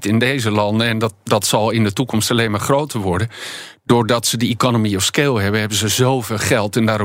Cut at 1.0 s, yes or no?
no